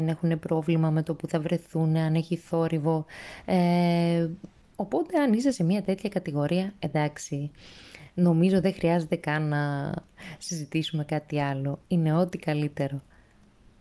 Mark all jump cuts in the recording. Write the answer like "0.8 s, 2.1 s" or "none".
none

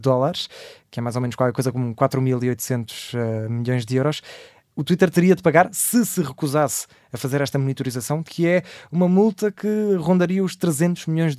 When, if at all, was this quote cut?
8.2 s

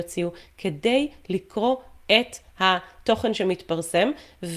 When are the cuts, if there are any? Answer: none

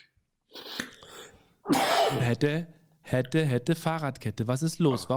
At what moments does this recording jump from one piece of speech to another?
none

